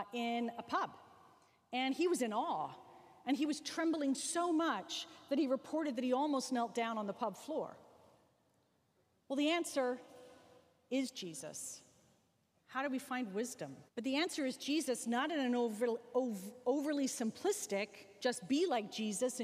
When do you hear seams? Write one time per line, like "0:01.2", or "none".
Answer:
0:09.2
0:13.9